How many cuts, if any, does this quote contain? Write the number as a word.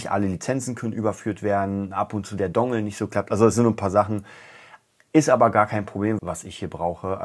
one